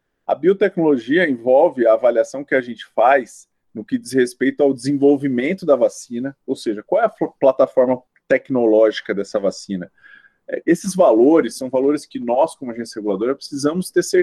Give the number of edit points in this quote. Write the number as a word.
one